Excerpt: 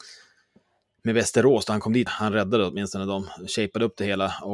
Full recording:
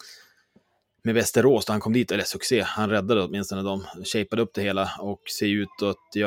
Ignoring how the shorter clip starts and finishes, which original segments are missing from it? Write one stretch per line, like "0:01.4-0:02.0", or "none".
0:02.1-0:02.6